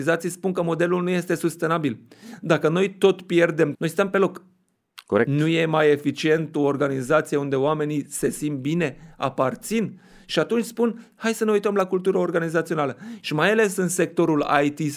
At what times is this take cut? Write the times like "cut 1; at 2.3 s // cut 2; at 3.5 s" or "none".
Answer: cut 1; at 3.7 s // cut 2; at 13.2 s